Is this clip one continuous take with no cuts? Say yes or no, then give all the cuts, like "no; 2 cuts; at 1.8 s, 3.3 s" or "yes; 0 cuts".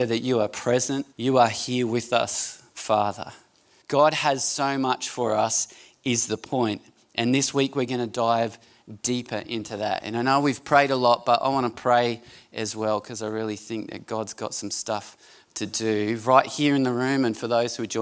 no; 2 cuts; at 1.1 s, 3.8 s